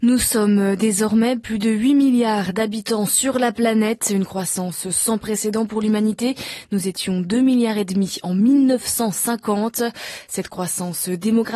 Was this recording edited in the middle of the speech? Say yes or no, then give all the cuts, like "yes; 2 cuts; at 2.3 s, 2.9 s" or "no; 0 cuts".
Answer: no; 0 cuts